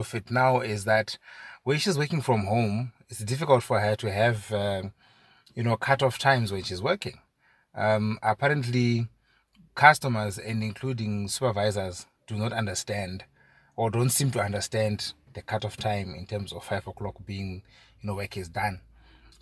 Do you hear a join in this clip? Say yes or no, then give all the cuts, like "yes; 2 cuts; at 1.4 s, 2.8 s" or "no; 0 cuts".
no; 0 cuts